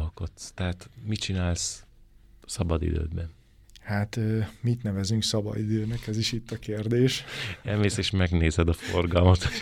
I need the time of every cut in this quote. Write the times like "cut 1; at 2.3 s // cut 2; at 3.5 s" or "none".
none